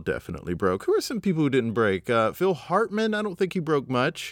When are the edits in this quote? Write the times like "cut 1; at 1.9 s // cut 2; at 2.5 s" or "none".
none